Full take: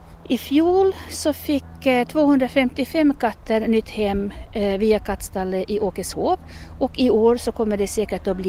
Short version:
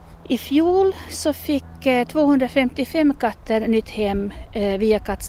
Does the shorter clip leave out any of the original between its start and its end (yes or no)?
no